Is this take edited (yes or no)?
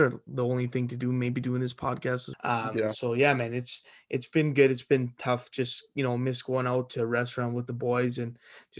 yes